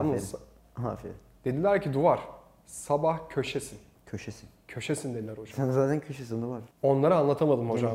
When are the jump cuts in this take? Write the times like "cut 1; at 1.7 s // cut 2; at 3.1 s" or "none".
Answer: none